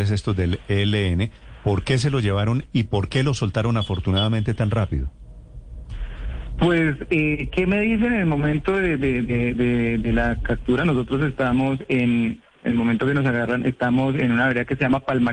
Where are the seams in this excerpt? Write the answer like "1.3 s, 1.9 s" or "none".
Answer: none